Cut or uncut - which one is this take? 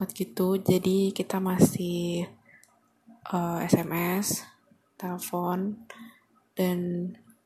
uncut